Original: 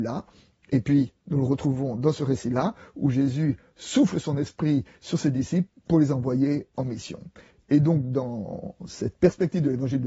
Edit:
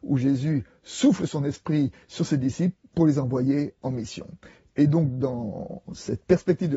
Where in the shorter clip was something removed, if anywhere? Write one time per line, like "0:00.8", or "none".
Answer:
none